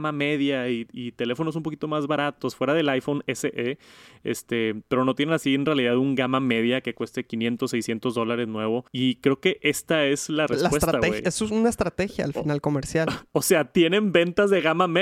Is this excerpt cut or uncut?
cut